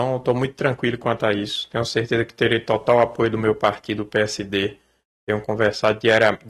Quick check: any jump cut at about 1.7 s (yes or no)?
no